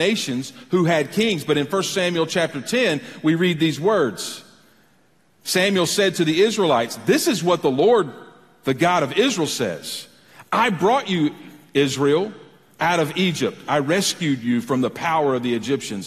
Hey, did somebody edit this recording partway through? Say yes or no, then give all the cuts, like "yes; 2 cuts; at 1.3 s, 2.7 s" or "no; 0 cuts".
no; 0 cuts